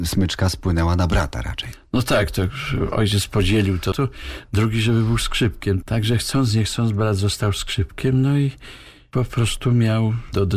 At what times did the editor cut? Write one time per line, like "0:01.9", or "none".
0:03.9